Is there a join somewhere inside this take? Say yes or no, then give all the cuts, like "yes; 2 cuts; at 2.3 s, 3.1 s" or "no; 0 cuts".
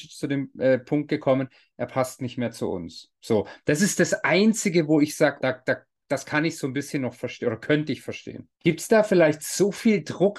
yes; 2 cuts; at 5.4 s, 8.5 s